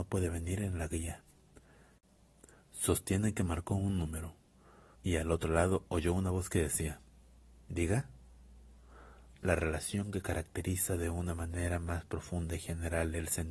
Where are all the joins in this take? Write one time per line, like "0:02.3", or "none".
0:05.0
0:09.3